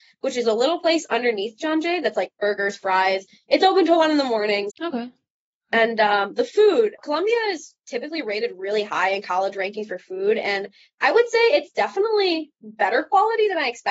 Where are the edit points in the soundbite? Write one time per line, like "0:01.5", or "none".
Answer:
0:04.7
0:07.0